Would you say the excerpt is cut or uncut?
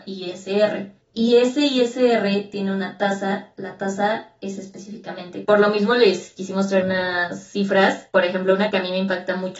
cut